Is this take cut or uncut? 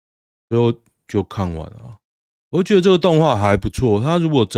uncut